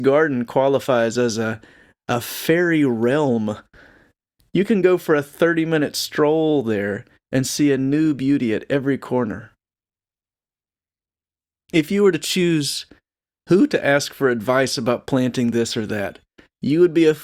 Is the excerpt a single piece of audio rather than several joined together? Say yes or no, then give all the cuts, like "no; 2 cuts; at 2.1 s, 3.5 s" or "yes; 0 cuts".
yes; 0 cuts